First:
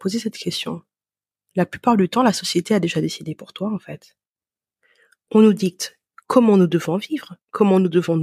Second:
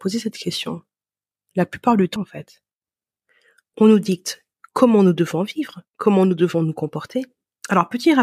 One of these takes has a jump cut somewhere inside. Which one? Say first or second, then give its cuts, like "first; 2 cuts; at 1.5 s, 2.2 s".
second; 1 cut; at 2.2 s